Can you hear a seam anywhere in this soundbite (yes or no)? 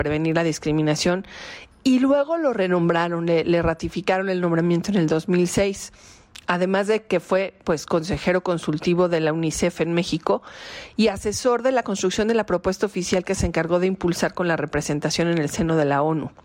no